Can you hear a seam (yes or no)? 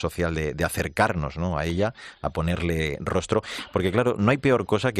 no